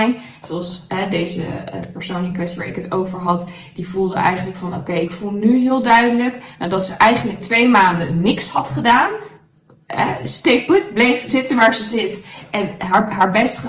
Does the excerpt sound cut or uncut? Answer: uncut